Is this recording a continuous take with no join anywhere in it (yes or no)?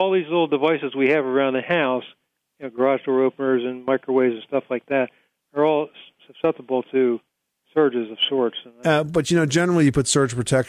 yes